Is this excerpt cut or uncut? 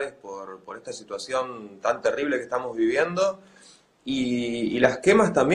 uncut